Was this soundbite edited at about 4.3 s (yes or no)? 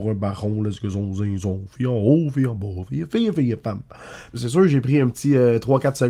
yes